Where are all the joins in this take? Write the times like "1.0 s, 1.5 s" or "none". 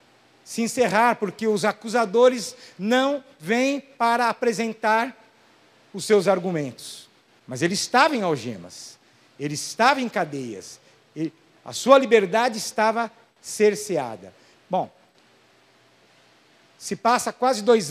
7.4 s, 14.5 s